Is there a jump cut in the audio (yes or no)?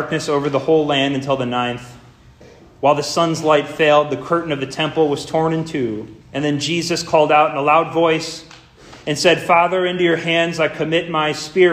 yes